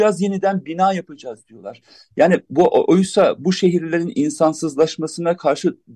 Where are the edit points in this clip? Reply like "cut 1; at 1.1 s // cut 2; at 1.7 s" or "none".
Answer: cut 1; at 2.5 s